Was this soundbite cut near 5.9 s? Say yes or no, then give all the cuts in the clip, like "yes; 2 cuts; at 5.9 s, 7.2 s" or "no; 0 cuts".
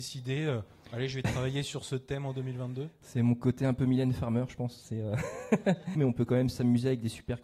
yes; 1 cut; at 5.9 s